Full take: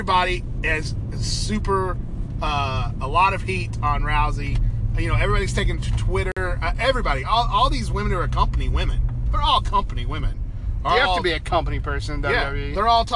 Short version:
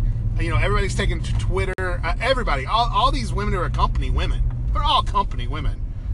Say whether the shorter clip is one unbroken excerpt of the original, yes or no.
yes